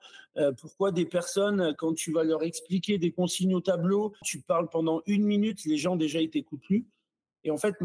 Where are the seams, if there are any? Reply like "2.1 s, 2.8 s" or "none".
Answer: 4.2 s